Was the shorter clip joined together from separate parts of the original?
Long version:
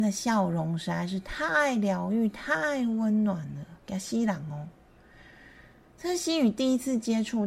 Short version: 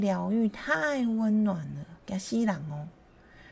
no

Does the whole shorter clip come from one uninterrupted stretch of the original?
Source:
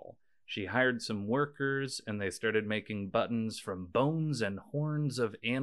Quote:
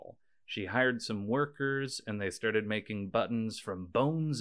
yes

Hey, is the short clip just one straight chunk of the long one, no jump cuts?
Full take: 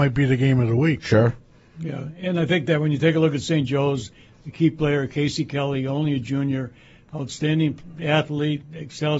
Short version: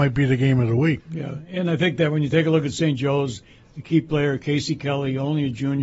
no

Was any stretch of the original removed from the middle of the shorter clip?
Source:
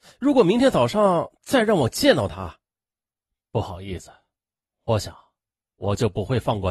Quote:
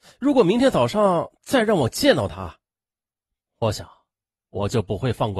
yes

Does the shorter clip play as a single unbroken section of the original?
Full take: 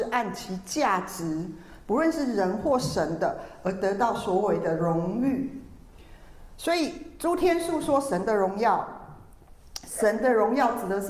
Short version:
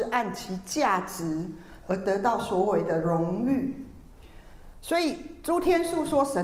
no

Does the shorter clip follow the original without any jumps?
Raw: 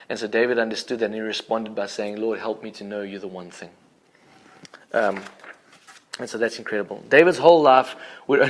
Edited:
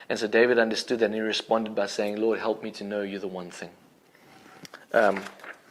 yes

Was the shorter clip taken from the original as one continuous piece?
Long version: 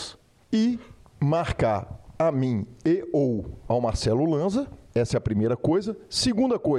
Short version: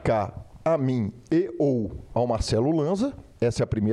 yes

